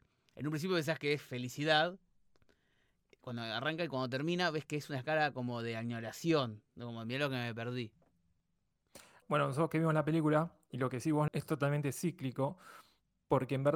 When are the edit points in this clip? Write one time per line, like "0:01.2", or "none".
0:09.2
0:11.3